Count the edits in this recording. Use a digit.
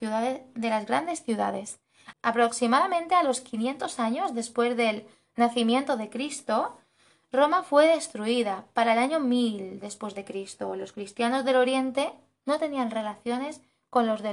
1